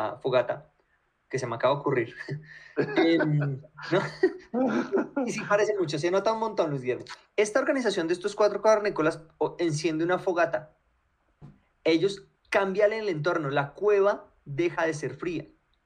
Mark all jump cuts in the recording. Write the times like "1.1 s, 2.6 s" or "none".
3.9 s, 7.3 s, 12.3 s